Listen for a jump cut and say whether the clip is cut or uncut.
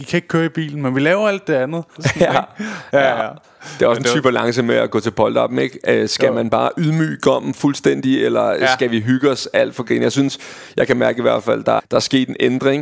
cut